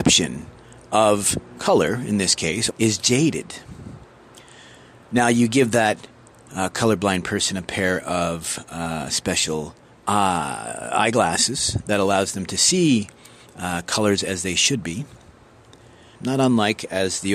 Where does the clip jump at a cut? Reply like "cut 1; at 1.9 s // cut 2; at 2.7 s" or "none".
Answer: cut 1; at 2.7 s // cut 2; at 16.2 s

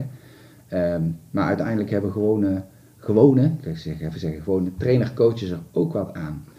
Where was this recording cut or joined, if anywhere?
none

